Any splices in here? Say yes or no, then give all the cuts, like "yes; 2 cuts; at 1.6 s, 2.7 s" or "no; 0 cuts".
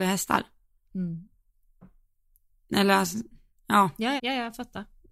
yes; 1 cut; at 4.2 s